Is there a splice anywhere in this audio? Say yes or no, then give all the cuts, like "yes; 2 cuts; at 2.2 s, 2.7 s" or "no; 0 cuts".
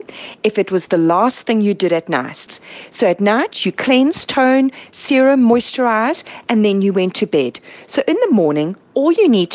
no; 0 cuts